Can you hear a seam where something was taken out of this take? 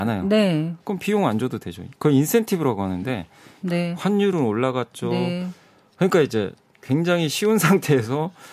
yes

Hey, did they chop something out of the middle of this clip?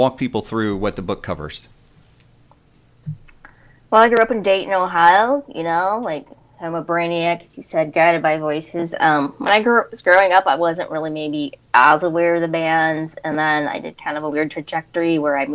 no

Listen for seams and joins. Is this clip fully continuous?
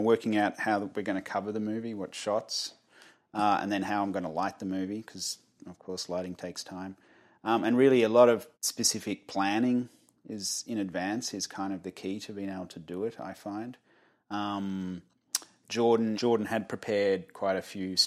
no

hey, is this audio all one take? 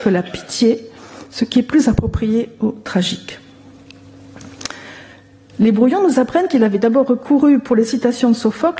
no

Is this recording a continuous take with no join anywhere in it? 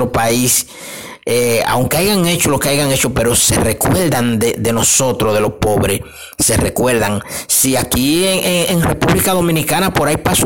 yes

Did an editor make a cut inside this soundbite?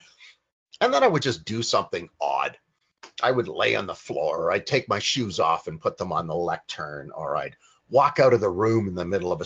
no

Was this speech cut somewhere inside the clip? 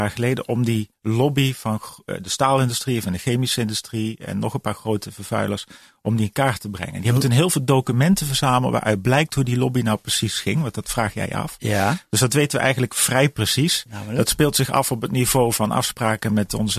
no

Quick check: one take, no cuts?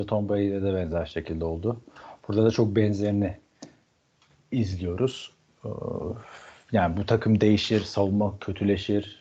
yes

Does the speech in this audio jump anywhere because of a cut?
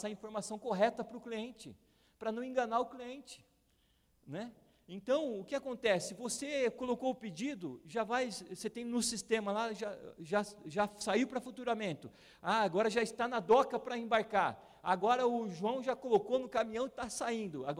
no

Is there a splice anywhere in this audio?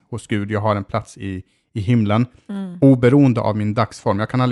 no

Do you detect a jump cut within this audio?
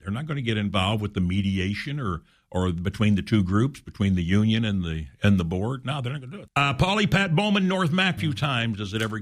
yes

